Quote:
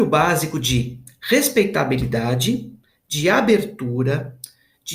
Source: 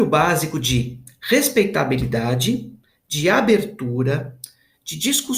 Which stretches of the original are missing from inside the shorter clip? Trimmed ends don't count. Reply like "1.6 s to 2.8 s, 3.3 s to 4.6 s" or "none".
none

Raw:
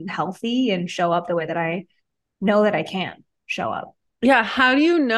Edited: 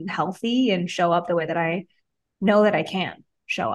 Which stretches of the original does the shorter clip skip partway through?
none

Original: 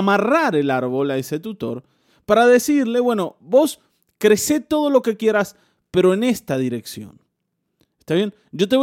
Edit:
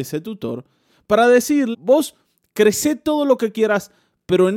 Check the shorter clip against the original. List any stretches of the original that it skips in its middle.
2.9 s to 3.4 s

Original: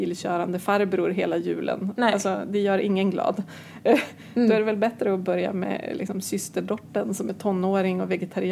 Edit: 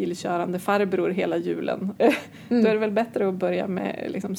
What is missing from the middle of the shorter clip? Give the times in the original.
2.0 s to 3.8 s

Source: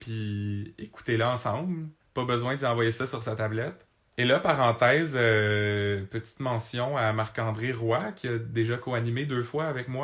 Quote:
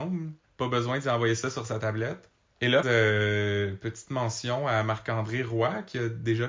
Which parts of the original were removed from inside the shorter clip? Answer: 4.4 s to 5.1 s

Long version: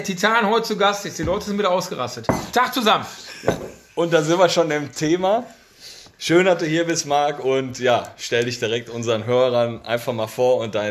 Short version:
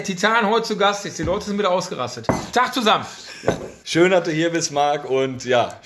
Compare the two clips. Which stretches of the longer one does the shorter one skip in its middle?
3.8 s to 6.2 s

